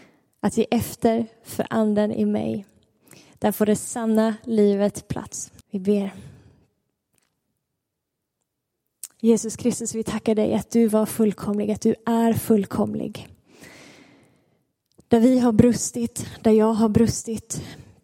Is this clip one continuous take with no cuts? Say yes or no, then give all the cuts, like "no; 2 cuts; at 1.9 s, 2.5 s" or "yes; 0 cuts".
no; 1 cut; at 5.6 s